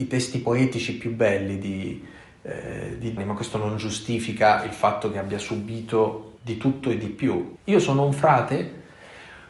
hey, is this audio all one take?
no; 3 cuts; at 3.2 s, 6.4 s, 7.6 s

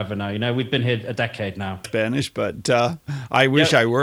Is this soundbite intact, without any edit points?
no; 1 cut; at 1.8 s

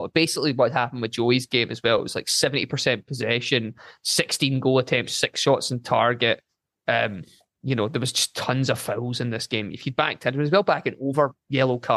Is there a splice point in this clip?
no; 0 cuts

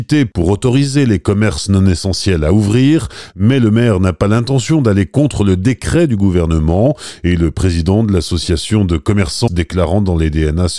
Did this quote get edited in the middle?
yes; 1 cut; at 9.5 s

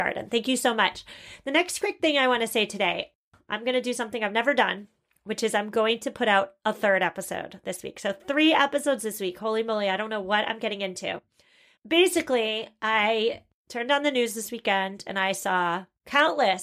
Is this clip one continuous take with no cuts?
yes; 0 cuts

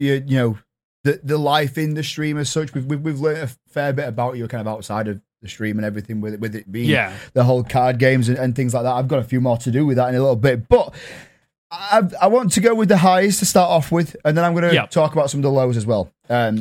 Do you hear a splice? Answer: no; 0 cuts

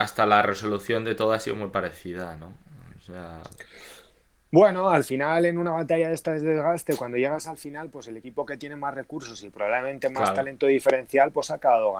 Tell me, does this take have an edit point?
no; 0 cuts

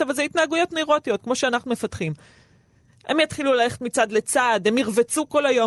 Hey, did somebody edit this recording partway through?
no; 0 cuts

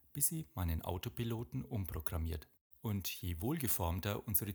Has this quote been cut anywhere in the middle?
yes; 1 cut; at 2.7 s

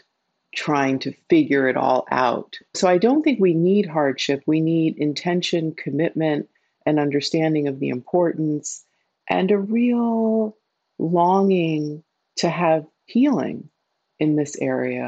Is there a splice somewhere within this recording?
no; 0 cuts

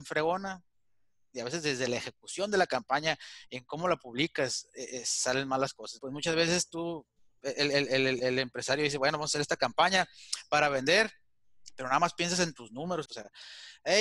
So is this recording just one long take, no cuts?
no; 2 cuts; at 6.0 s, 13.0 s

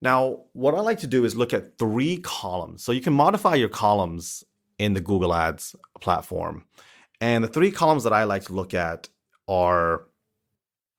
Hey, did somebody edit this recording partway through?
no; 0 cuts

